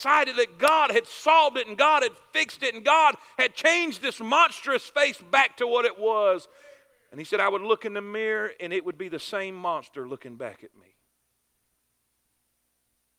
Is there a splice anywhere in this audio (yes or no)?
no